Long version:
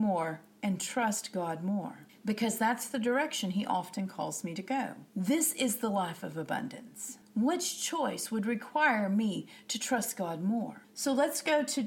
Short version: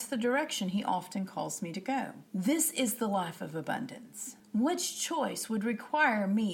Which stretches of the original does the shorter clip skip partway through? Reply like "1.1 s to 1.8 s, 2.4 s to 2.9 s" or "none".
none